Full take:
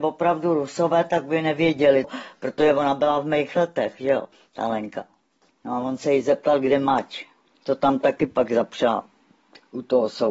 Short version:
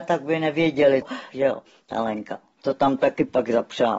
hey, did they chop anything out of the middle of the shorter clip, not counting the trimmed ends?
yes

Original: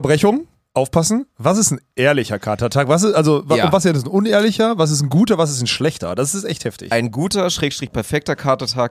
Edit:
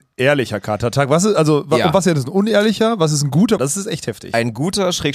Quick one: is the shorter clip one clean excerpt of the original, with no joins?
no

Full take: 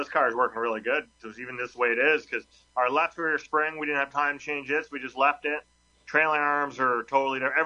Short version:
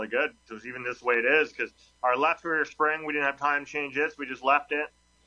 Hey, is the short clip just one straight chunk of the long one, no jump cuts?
yes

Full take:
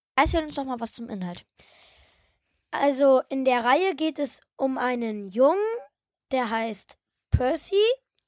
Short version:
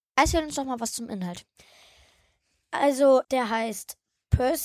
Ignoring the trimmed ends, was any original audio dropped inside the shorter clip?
yes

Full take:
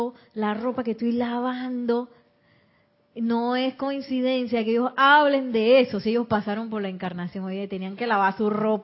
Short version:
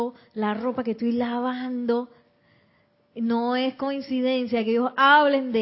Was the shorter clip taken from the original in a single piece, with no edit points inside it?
yes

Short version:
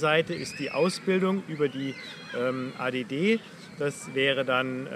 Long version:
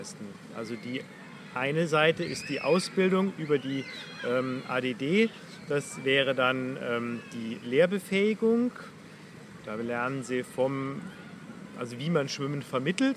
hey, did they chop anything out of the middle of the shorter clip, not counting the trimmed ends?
no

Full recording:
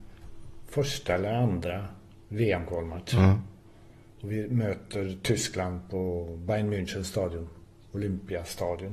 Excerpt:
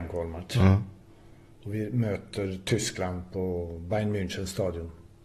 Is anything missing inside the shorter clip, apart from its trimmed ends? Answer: no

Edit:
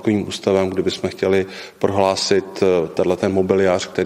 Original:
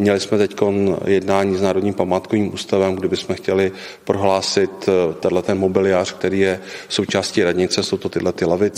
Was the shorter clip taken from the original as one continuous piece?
yes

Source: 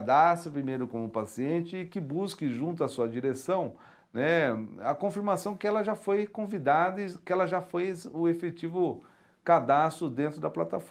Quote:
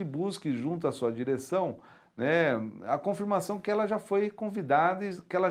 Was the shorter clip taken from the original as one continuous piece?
yes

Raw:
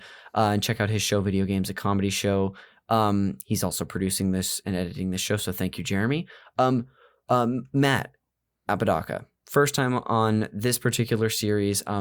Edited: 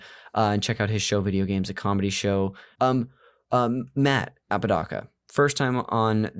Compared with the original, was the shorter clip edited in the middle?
yes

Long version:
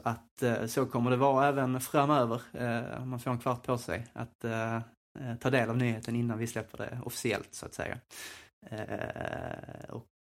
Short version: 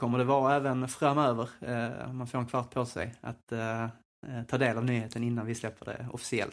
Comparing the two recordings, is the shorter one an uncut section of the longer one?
yes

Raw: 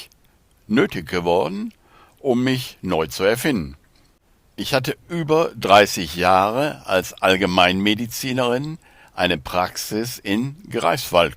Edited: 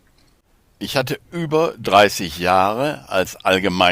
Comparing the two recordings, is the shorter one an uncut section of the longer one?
yes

